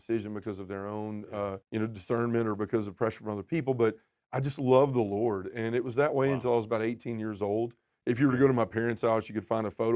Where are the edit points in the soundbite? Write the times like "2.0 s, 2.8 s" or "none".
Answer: 1.6 s